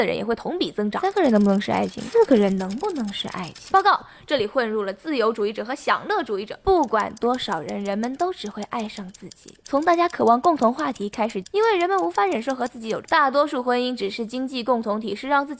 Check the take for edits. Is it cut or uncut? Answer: cut